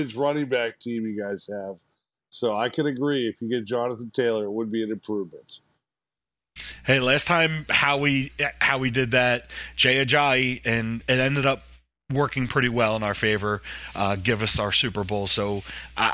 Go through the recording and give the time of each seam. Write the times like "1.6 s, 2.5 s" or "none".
11.0 s